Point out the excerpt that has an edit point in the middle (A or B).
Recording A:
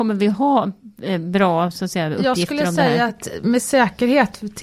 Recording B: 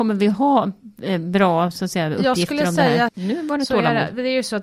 B